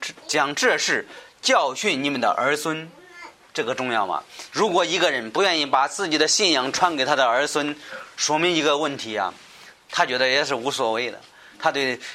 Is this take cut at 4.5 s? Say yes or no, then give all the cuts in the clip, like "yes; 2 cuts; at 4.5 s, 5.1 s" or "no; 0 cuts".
yes; 2 cuts; at 4.5 s, 9.7 s